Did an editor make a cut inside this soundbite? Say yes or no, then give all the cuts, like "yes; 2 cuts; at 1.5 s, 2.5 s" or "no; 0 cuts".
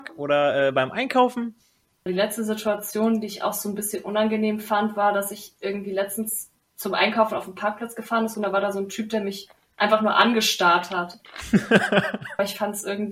yes; 1 cut; at 2.1 s